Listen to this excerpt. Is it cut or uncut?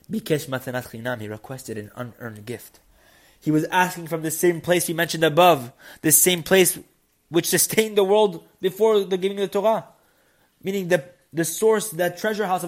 uncut